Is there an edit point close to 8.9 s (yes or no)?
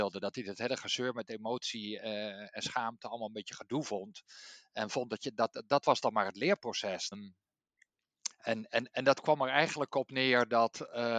no